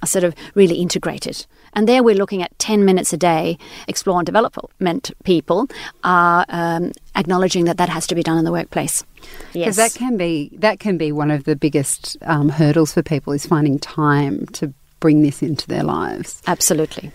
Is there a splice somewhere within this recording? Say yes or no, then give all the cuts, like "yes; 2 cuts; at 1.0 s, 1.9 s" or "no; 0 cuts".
yes; 2 cuts; at 3.9 s, 9.5 s